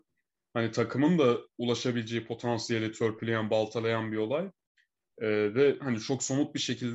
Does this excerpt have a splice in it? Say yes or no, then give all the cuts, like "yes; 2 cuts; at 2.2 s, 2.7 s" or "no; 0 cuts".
yes; 1 cut; at 5.0 s